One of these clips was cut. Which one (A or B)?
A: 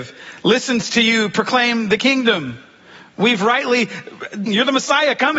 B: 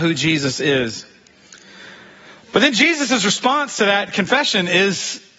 A